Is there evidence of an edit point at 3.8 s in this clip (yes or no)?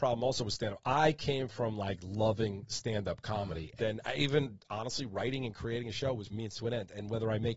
yes